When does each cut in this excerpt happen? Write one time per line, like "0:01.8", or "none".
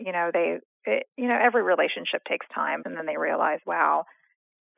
0:02.8